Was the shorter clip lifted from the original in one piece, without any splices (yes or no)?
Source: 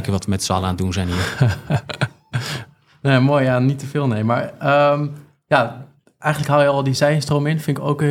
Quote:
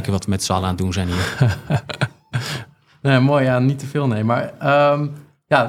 yes